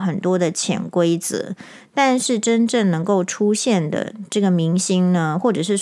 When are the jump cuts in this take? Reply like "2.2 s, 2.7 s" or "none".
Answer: none